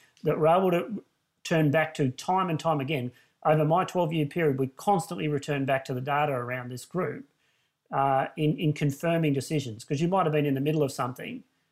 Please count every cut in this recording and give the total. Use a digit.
0